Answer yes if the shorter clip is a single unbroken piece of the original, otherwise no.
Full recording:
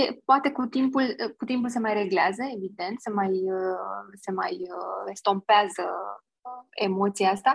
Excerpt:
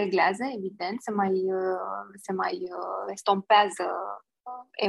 yes